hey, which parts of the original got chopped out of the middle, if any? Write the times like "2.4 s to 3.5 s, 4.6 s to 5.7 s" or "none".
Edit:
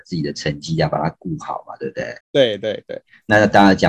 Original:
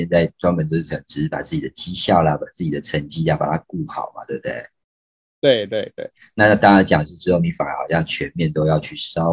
4.7 s to 5.3 s